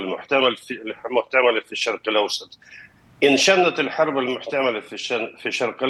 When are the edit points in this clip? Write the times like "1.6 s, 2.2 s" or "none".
none